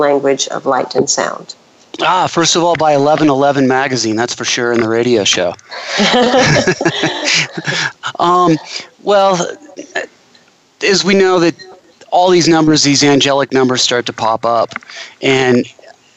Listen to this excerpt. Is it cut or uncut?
cut